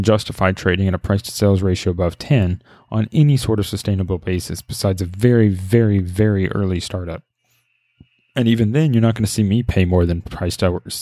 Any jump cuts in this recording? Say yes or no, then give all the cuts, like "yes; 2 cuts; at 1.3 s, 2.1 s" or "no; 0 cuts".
no; 0 cuts